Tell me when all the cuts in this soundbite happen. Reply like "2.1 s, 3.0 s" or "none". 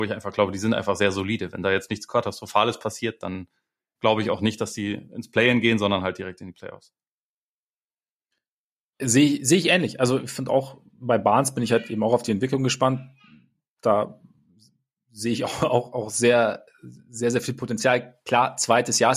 none